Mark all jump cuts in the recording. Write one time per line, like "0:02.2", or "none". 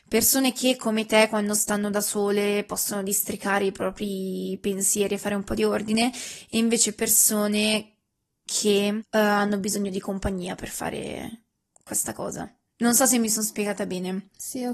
0:09.0